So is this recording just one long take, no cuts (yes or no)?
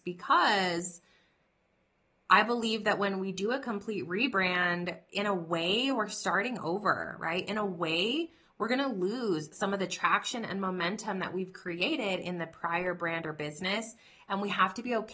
yes